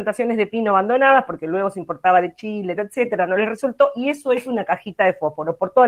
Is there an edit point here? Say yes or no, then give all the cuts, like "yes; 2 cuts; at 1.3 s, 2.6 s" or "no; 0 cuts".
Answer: yes; 1 cut; at 2.8 s